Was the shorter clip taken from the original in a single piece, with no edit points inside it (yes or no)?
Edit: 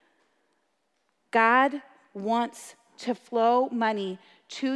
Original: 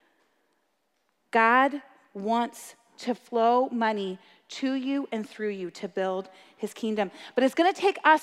yes